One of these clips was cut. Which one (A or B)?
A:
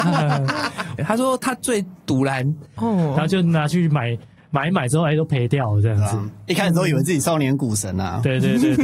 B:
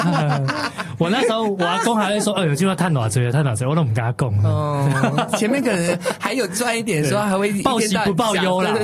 A